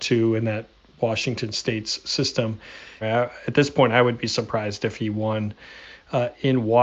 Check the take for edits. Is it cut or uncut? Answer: cut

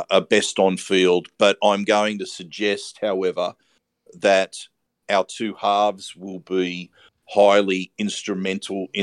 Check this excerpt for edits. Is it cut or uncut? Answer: uncut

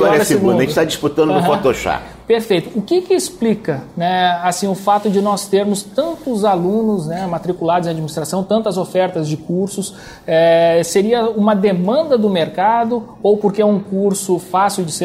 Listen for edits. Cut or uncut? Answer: uncut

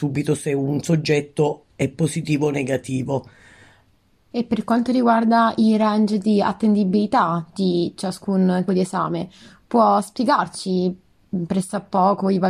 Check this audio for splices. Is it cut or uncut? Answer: cut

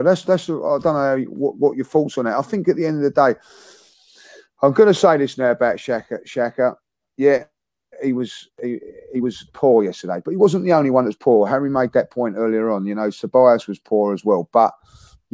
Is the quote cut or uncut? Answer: uncut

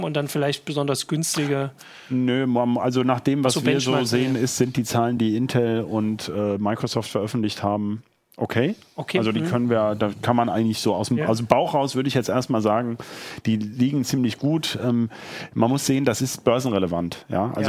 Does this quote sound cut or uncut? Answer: uncut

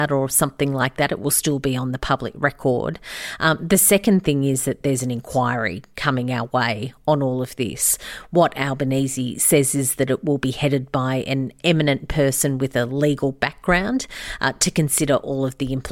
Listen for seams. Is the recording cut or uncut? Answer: uncut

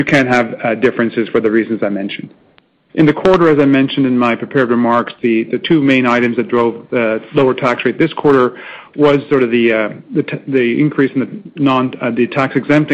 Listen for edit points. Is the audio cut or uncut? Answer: cut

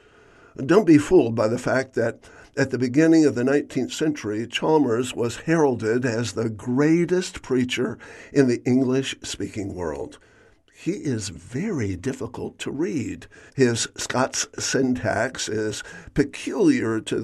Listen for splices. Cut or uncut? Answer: cut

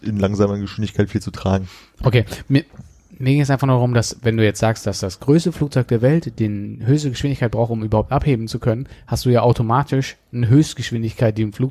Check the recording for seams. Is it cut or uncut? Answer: uncut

